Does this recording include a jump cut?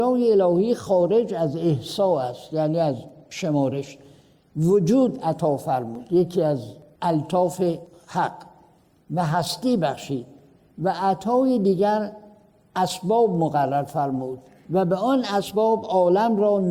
no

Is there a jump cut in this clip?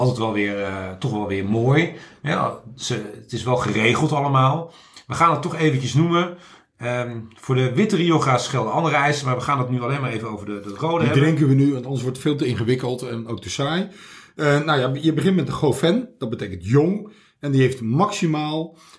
no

